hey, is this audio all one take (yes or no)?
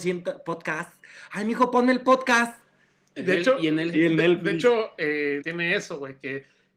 no